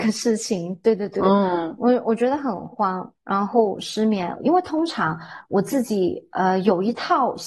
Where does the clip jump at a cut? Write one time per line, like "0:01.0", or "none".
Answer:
0:04.4